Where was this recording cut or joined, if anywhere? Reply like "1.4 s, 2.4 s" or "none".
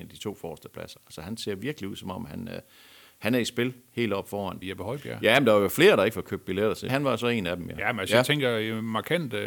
4.6 s, 6.9 s